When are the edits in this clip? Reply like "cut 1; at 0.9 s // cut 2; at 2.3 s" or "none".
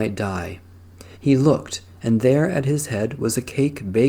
cut 1; at 1.1 s